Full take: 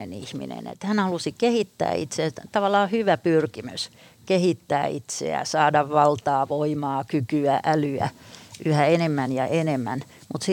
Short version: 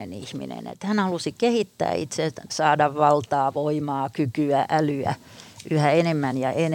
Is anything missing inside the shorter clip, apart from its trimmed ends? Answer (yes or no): yes